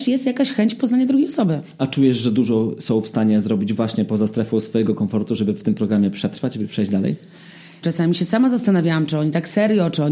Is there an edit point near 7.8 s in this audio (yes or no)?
yes